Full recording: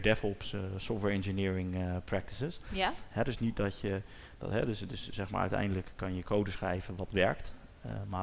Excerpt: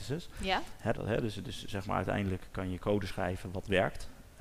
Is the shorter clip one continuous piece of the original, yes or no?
no